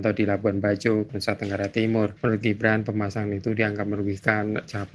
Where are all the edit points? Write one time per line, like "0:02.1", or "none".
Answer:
0:01.1